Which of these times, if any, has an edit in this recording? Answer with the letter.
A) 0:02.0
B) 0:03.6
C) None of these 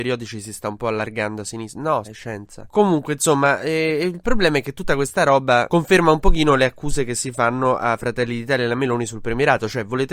A